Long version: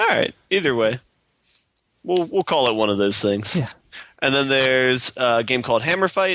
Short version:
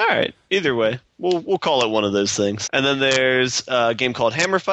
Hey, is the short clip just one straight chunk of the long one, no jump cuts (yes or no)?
no